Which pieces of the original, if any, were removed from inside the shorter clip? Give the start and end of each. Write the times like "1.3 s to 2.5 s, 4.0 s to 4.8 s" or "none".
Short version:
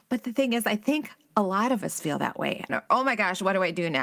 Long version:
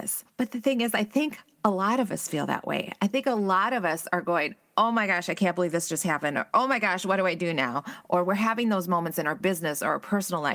3.0 s to 6.3 s